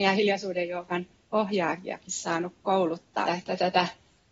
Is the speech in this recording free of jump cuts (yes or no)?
no